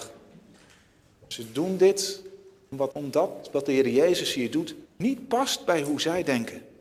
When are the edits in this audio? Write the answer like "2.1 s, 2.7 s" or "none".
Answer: 2.9 s, 4.8 s